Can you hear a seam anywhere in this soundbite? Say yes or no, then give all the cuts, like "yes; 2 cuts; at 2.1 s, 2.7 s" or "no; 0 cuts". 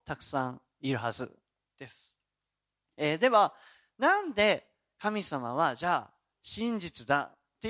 no; 0 cuts